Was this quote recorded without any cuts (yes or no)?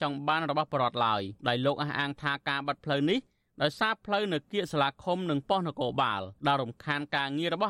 no